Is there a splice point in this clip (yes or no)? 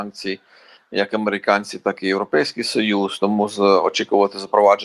no